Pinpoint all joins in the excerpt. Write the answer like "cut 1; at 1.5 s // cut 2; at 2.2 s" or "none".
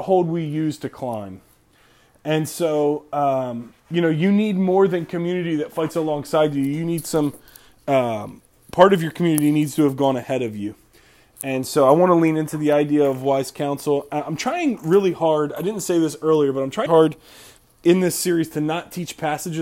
cut 1; at 3.8 s // cut 2; at 16.9 s